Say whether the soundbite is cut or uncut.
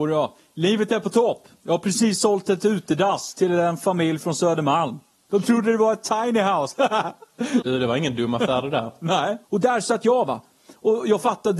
cut